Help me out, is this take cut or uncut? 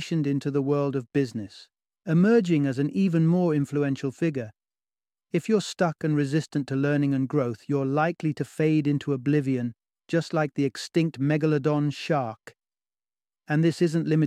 uncut